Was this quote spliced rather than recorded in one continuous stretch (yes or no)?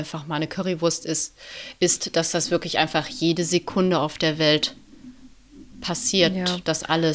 no